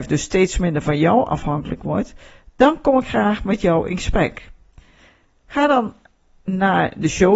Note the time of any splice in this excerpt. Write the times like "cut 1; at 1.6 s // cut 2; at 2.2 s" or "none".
none